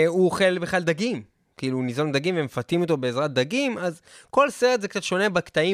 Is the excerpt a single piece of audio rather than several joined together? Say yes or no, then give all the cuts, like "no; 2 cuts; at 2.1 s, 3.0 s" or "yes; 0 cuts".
yes; 0 cuts